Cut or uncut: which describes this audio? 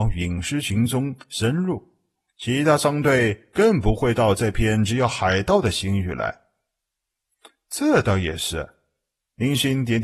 uncut